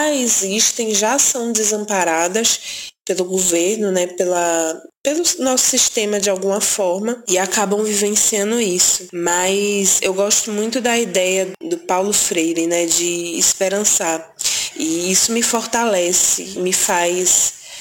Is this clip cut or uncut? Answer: cut